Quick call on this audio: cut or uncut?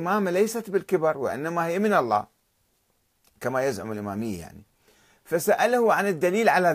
uncut